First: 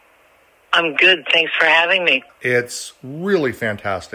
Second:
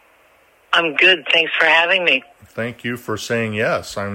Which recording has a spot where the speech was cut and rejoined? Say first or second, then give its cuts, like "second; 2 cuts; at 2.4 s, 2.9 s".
first; 1 cut; at 2.3 s